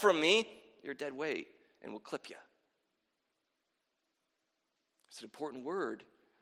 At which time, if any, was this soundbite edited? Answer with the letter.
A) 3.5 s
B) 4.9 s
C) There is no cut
C